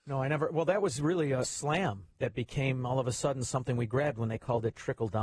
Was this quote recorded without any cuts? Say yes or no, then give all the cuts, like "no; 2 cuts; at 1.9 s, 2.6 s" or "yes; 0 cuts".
no; 1 cut; at 1.4 s